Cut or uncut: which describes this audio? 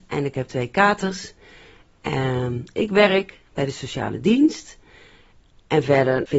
uncut